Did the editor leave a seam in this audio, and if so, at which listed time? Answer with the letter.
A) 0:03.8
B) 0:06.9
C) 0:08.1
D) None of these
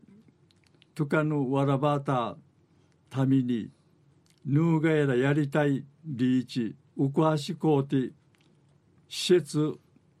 B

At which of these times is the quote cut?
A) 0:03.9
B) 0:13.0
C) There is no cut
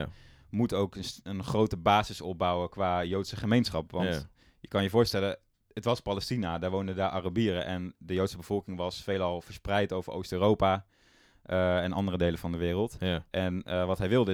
C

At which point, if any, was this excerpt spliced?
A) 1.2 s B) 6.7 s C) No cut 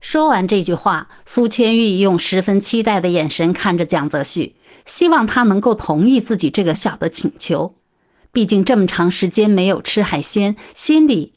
B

